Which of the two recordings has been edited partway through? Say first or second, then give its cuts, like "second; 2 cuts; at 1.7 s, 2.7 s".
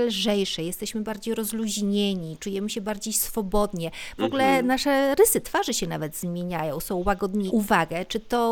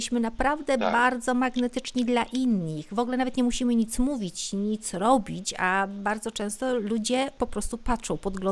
first; 2 cuts; at 4.2 s, 7.5 s